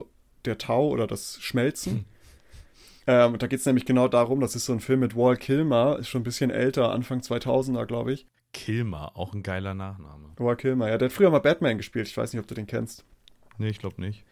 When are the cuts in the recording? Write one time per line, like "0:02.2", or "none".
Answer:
none

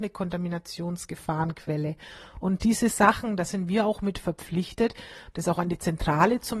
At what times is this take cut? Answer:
0:05.3

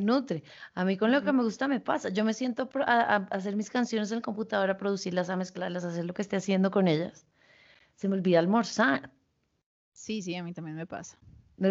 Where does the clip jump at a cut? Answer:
none

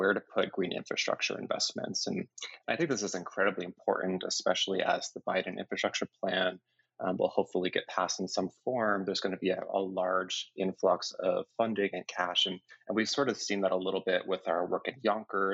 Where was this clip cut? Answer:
none

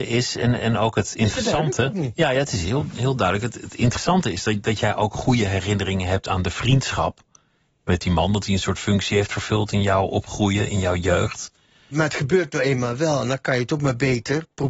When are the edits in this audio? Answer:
0:11.9

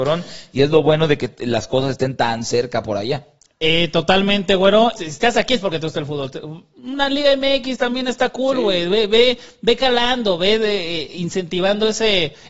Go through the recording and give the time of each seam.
0:05.0

